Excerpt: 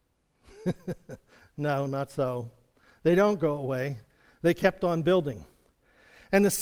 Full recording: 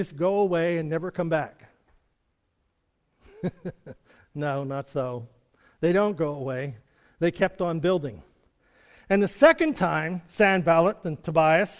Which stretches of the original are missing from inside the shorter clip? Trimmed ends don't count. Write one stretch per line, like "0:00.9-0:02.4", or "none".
none